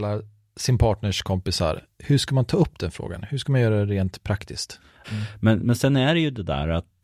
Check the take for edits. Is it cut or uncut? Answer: cut